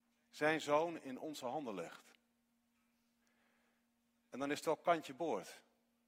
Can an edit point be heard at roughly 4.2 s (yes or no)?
no